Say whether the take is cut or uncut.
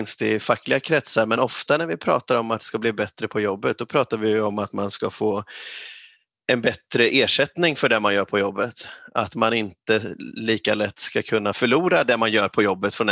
uncut